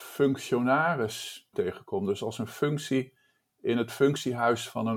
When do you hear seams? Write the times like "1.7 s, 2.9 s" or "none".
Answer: 1.5 s

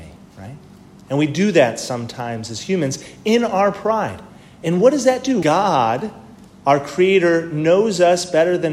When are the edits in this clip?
5.4 s

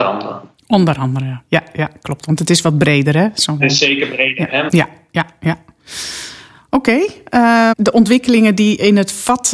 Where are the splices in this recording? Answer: 3.6 s, 4.7 s, 7.7 s

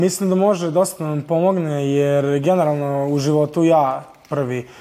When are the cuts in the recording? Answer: none

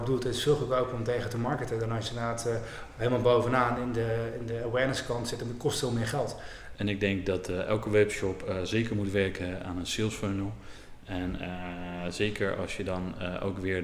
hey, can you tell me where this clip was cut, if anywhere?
6.7 s

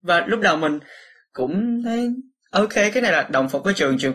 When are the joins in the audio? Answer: none

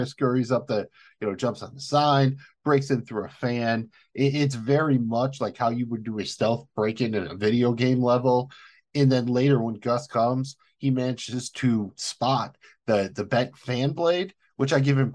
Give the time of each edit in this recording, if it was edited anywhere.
none

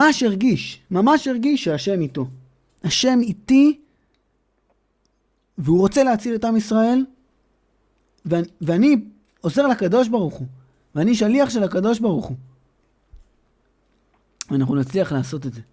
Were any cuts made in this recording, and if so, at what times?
none

